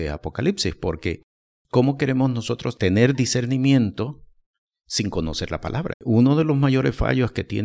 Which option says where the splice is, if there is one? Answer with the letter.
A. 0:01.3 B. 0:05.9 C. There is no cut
B